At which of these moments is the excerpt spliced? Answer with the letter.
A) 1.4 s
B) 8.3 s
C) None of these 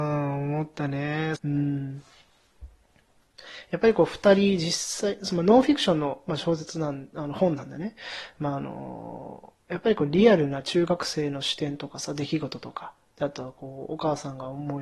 A